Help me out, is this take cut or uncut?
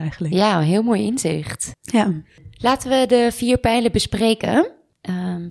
uncut